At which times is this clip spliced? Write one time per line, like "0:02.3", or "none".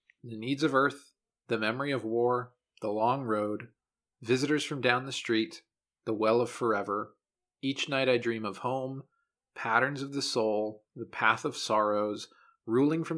none